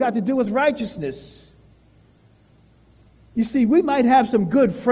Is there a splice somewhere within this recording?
no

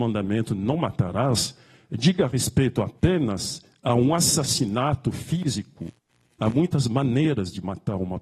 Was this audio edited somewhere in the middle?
no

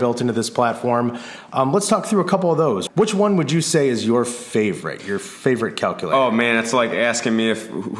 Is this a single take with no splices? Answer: no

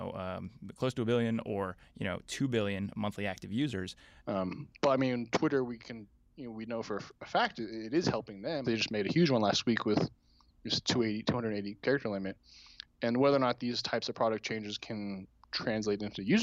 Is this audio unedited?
no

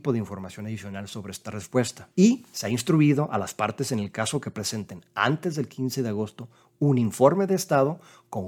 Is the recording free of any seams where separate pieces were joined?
no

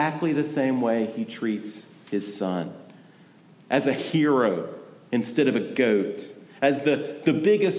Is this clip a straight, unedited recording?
yes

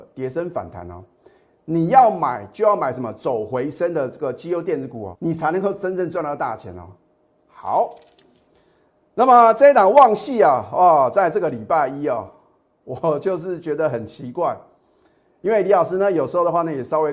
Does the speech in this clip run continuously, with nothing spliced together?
no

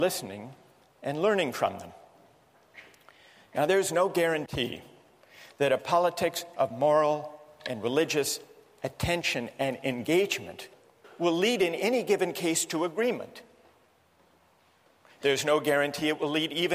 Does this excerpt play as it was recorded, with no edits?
yes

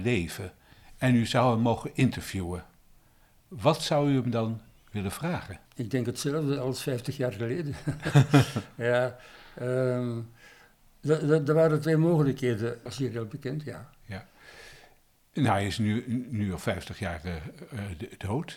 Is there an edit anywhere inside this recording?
yes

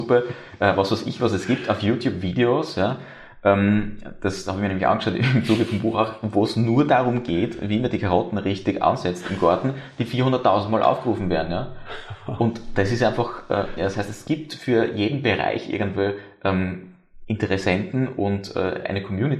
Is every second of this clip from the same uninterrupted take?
no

